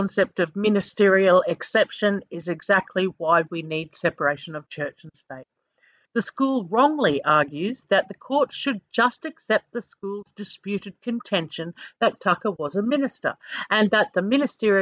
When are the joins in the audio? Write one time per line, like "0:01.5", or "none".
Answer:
0:06.1